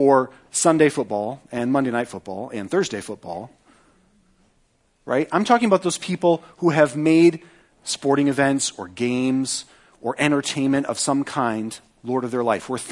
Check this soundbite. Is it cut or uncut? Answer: uncut